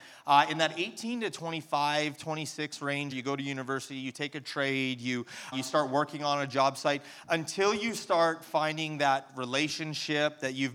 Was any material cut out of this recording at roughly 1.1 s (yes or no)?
no